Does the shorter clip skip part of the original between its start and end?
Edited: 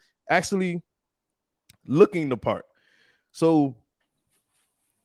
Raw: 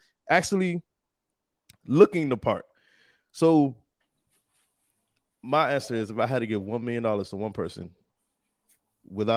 no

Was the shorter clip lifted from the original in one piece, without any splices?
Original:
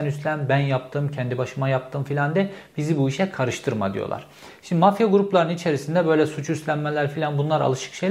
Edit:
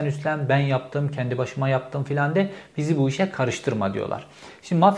yes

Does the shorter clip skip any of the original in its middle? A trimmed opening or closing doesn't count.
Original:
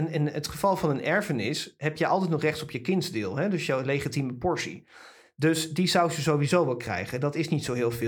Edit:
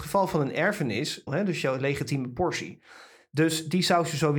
yes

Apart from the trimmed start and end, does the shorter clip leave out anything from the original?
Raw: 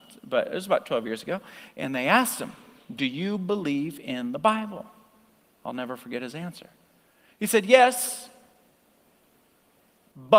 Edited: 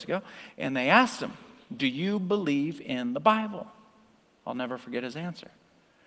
no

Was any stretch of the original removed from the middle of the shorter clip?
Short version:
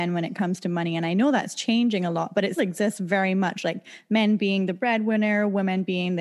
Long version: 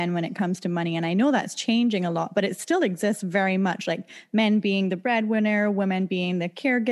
yes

